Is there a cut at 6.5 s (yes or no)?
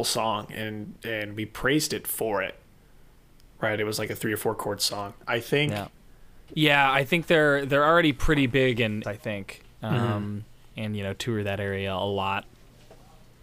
yes